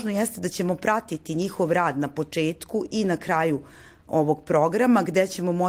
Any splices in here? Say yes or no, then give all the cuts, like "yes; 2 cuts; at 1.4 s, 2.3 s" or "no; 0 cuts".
no; 0 cuts